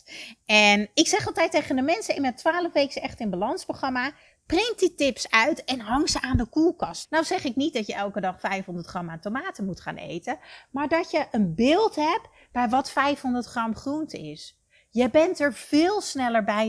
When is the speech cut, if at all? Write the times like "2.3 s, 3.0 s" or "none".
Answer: 7.0 s